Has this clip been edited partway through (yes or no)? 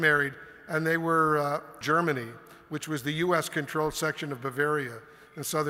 yes